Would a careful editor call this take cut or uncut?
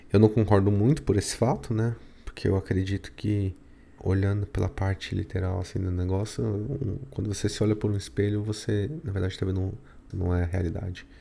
cut